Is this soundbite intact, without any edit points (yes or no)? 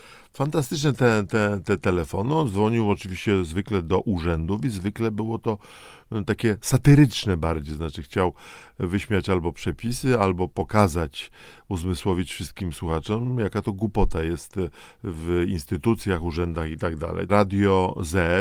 no